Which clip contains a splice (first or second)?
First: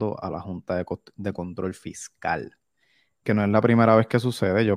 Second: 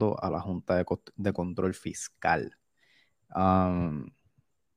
first